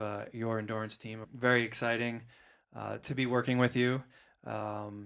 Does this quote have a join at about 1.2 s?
yes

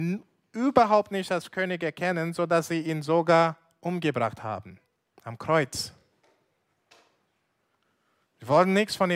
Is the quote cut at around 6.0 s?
no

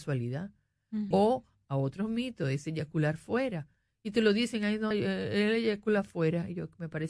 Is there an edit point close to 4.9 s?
yes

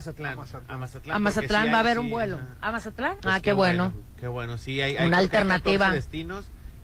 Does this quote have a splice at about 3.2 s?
yes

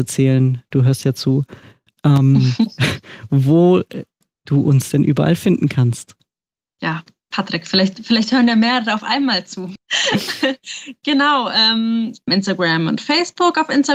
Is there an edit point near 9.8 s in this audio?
yes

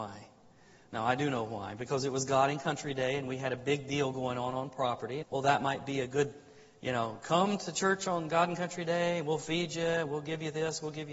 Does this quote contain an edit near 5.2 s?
yes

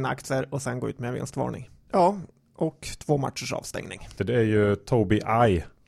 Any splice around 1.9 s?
yes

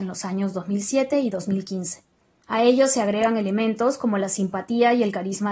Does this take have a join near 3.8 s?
no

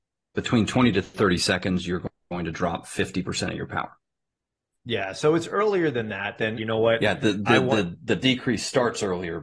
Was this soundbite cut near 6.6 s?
yes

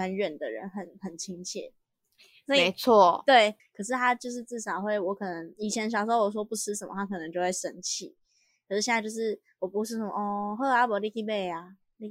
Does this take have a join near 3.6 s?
yes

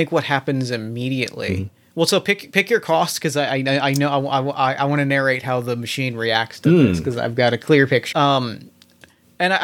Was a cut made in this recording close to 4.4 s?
no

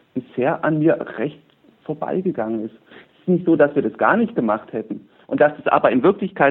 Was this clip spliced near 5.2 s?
yes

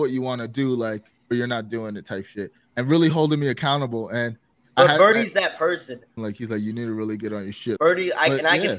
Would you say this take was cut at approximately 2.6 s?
no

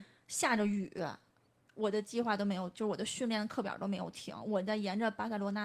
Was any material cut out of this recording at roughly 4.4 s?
no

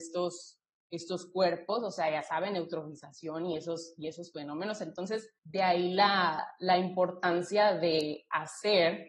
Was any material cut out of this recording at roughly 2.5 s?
no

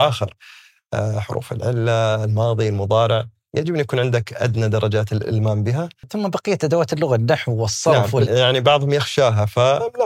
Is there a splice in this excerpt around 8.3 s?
yes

